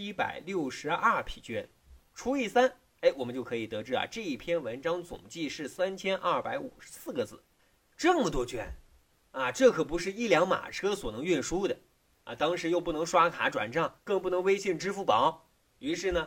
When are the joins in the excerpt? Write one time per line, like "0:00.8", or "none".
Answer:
none